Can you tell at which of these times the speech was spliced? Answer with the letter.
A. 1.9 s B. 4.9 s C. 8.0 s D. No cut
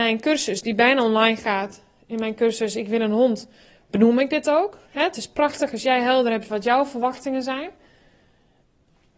D